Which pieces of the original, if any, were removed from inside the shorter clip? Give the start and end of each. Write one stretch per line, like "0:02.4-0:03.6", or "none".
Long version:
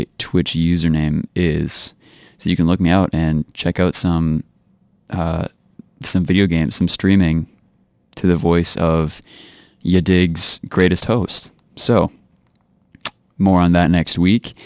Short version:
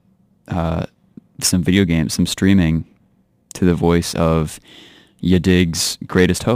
none